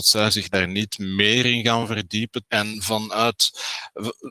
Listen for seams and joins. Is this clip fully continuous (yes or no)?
no